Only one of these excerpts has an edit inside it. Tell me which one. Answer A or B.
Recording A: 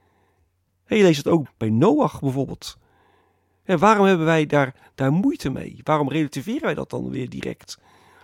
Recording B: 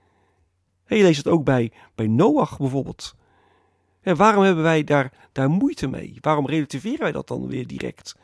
A